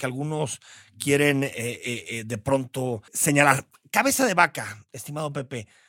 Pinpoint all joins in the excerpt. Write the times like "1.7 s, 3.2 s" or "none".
3.1 s